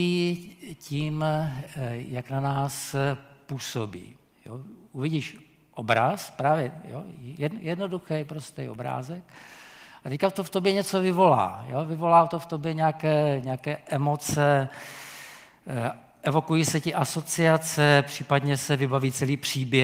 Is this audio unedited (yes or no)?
yes